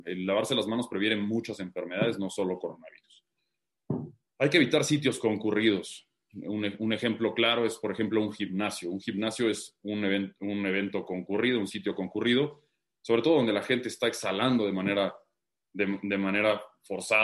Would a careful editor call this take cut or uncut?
uncut